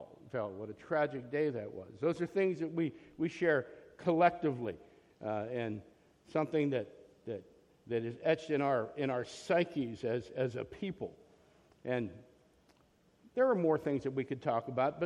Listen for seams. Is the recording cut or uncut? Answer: uncut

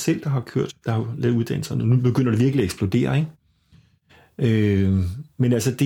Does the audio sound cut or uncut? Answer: uncut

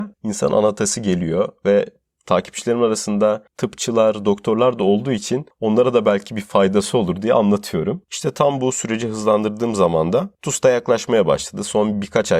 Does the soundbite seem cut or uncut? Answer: uncut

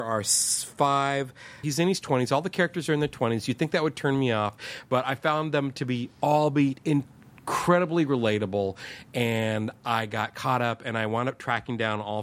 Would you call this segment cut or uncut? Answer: cut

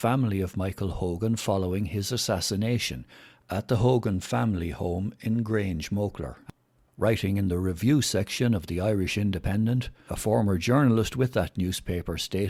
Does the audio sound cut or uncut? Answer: cut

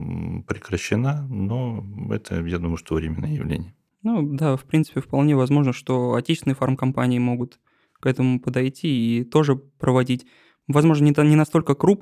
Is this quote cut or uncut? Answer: uncut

